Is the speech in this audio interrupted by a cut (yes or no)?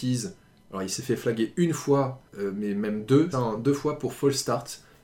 yes